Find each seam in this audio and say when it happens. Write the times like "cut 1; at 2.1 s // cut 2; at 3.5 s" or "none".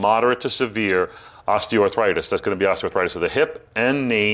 none